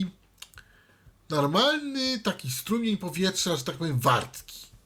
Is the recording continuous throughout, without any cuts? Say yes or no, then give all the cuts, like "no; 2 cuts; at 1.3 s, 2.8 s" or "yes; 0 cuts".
yes; 0 cuts